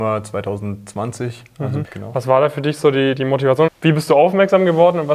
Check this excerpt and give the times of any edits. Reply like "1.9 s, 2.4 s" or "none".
1.8 s, 3.7 s